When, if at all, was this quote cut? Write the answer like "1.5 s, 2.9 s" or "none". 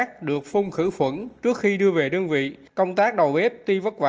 2.7 s